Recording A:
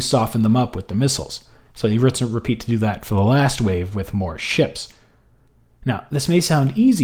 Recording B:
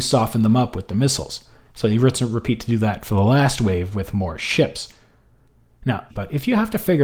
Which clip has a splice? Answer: B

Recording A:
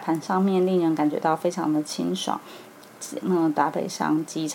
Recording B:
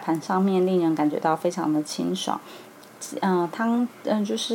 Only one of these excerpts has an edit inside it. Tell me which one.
A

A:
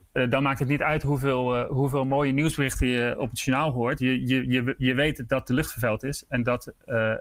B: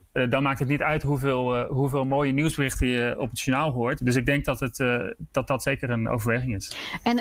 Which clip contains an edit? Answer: B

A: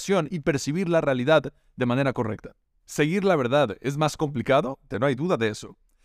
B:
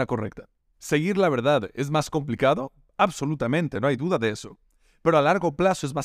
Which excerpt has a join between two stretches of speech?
A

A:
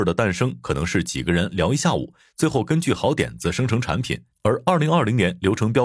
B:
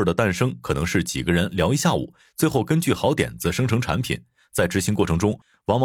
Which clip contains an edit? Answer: A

